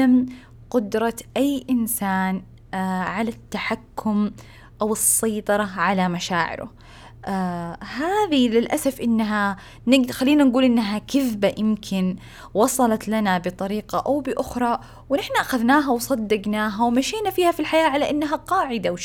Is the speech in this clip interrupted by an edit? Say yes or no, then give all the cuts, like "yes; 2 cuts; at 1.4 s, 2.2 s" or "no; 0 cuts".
no; 0 cuts